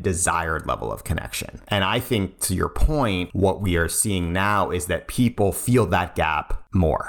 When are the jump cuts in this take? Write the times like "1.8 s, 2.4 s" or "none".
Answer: none